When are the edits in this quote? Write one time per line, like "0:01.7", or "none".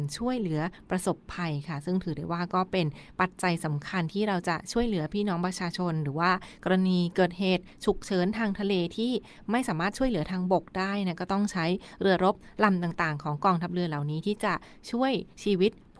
none